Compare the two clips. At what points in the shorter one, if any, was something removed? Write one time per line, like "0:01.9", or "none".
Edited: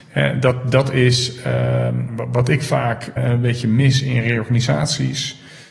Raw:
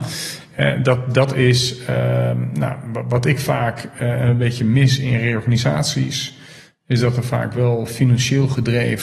0:02.1
0:03.2